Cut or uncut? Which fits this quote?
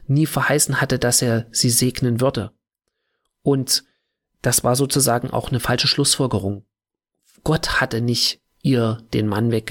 uncut